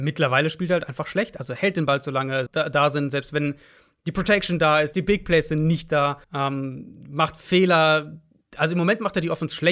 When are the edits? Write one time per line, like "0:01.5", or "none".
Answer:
0:02.5
0:06.2